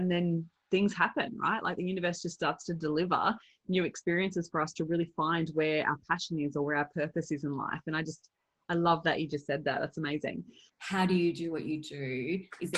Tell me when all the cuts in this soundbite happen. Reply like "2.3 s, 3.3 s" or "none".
10.7 s